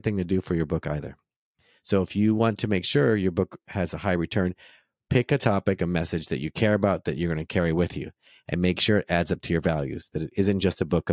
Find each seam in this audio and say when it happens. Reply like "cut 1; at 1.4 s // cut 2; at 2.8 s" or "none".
cut 1; at 5.8 s